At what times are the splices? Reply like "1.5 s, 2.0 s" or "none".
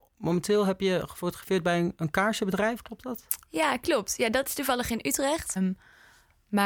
5.6 s